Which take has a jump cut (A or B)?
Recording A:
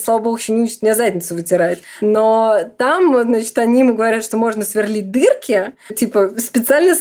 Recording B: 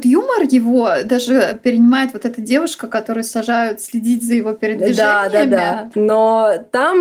B